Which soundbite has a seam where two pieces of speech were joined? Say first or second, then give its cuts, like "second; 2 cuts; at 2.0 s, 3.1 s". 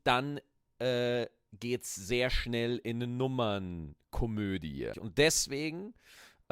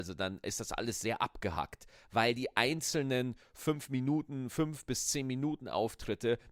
first; 1 cut; at 4.9 s